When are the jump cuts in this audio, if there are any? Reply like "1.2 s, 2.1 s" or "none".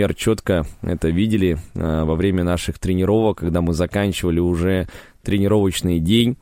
none